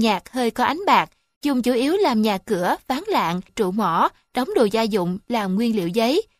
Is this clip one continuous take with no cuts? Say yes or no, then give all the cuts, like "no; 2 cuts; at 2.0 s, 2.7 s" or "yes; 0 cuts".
no; 1 cut; at 3.5 s